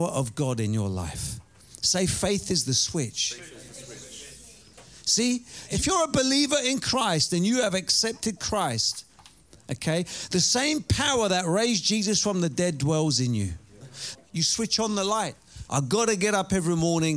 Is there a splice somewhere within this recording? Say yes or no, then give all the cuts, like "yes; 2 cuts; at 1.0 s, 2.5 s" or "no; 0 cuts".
yes; 2 cuts; at 14.2 s, 15.7 s